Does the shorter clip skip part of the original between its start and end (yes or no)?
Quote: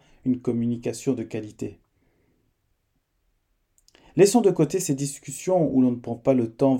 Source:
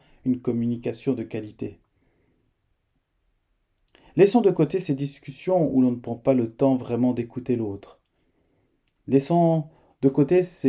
no